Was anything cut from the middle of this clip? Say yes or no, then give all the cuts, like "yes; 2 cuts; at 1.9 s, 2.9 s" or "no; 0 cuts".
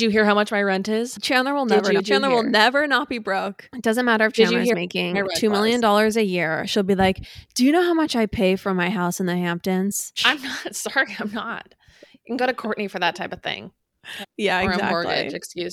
yes; 2 cuts; at 10.2 s, 14.2 s